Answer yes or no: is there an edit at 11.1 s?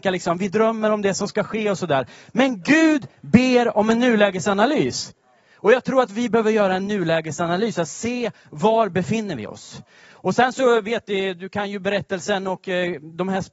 no